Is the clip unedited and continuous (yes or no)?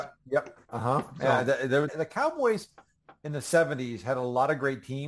no